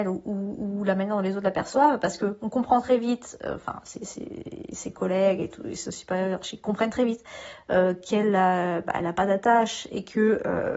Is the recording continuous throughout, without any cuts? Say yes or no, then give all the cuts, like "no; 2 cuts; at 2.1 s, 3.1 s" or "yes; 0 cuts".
yes; 0 cuts